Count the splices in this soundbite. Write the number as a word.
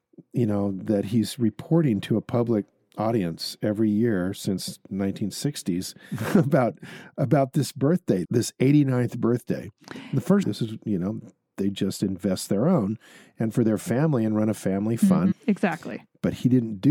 three